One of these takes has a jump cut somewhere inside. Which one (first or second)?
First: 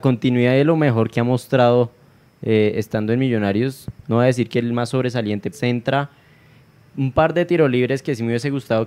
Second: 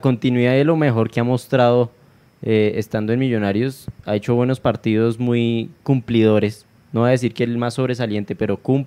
first